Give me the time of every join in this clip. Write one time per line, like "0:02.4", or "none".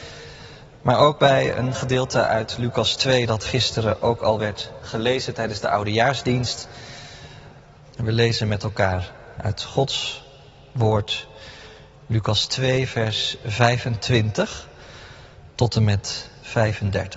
0:07.8